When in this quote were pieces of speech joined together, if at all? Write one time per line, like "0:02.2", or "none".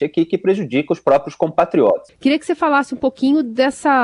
0:02.1